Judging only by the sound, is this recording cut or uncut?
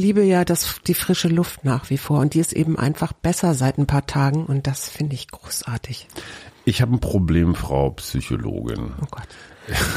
uncut